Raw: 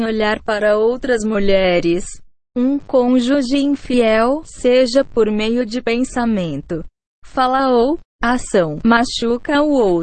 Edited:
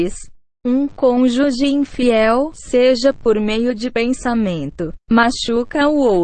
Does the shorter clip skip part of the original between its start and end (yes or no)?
yes